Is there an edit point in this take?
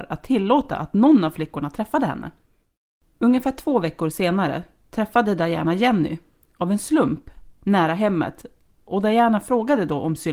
yes; 1 cut; at 3.1 s

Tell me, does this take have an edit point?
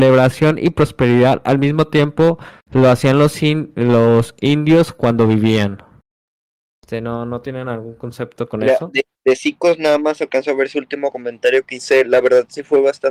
no; 0 cuts

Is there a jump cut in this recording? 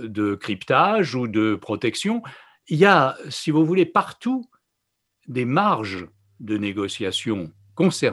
no; 0 cuts

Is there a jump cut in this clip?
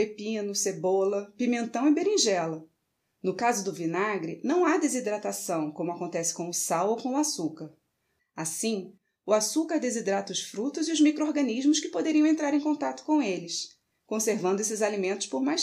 yes; 1 cut; at 8.2 s

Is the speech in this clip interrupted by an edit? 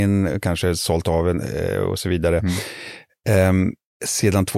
no; 0 cuts

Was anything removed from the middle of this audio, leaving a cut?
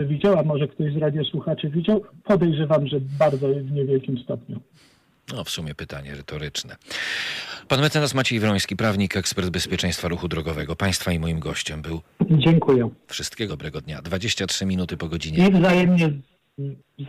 yes; 2 cuts; at 12.0 s, 13.5 s

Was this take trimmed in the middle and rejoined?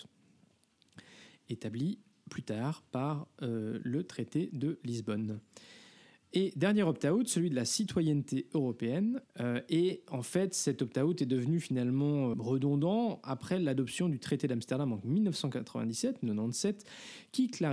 yes; 2 cuts; at 9.2 s, 12.3 s

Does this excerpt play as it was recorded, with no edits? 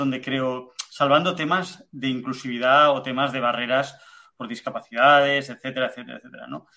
yes; 0 cuts

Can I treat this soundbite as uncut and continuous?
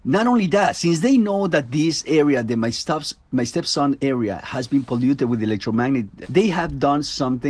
no; 1 cut; at 6.2 s

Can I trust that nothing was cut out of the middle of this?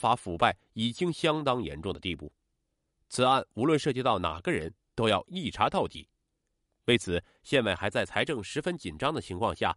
yes; 0 cuts

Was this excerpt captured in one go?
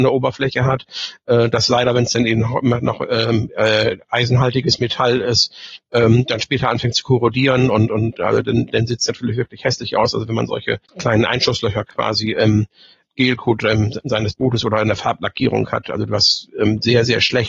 yes; 0 cuts

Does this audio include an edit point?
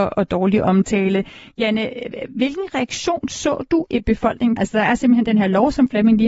yes; 1 cut; at 4.6 s

